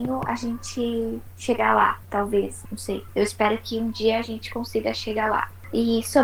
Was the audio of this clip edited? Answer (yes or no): no